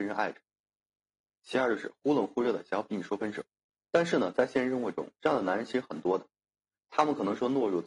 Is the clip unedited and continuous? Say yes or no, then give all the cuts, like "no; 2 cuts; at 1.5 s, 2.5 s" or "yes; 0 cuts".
no; 1 cut; at 3.7 s